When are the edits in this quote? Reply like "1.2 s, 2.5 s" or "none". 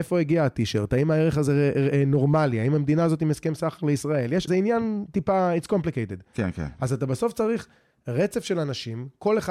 4.5 s